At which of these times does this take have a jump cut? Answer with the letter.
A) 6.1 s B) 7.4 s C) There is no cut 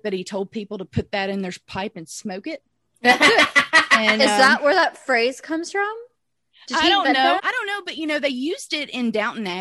B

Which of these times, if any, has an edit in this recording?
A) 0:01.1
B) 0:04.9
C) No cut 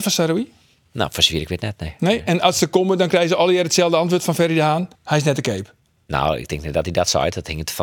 B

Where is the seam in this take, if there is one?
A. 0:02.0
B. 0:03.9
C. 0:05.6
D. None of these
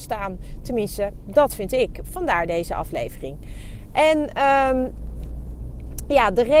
D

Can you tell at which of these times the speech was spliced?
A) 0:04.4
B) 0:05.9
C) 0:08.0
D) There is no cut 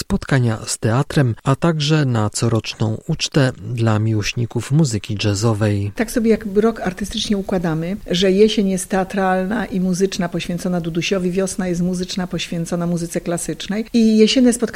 D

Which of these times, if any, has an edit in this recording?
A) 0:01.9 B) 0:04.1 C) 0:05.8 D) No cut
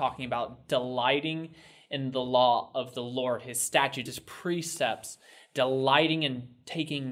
B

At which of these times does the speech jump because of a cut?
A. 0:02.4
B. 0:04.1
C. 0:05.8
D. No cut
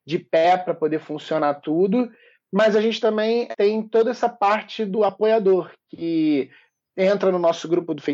D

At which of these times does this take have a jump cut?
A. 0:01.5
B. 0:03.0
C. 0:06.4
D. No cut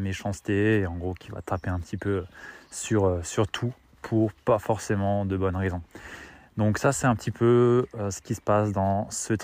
D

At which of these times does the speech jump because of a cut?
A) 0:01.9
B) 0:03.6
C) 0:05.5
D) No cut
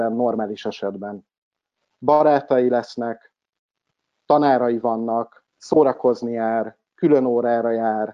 C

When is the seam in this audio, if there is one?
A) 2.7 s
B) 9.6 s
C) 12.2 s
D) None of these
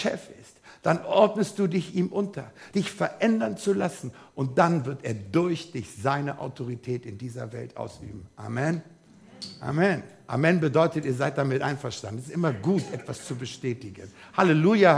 A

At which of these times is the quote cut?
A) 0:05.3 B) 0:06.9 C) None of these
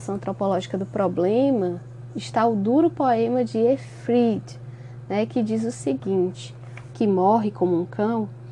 B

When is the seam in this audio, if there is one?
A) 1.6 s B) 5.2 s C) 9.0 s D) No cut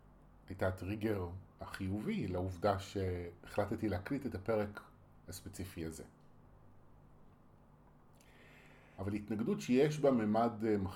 C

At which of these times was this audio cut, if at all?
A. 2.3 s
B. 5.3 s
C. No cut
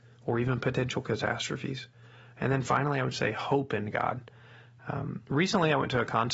C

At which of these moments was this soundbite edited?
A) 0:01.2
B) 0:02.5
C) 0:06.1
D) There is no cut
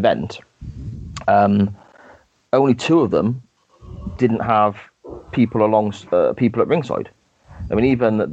D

